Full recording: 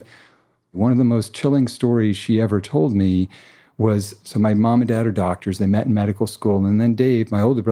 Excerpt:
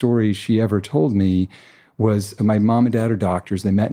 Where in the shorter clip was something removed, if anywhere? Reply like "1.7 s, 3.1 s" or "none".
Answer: 2.4 s